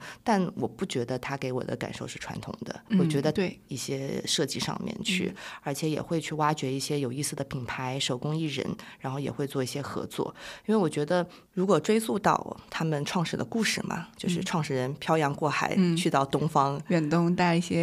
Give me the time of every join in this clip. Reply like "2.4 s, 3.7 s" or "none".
3.7 s